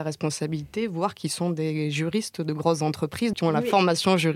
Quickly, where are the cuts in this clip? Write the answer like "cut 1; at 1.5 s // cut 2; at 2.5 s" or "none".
cut 1; at 3.3 s